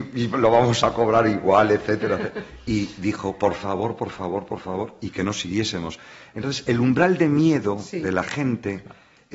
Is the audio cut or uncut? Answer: uncut